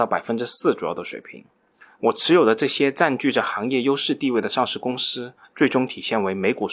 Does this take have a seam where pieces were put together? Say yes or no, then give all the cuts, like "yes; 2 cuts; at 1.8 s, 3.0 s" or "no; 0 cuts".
yes; 2 cuts; at 1.9 s, 5.4 s